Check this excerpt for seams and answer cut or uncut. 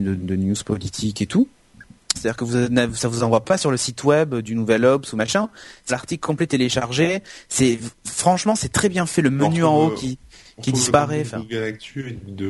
cut